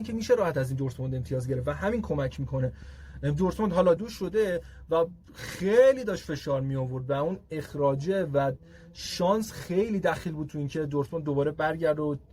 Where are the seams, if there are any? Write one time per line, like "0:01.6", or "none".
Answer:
0:04.0